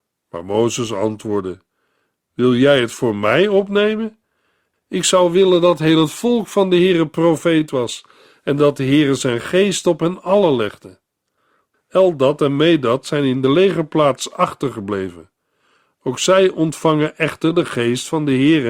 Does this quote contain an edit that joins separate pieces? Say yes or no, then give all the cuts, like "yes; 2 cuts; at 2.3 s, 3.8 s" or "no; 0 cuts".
yes; 1 cut; at 11.7 s